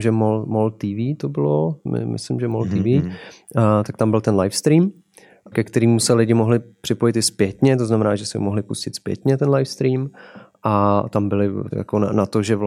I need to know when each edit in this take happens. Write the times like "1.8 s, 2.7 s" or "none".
5.5 s, 11.7 s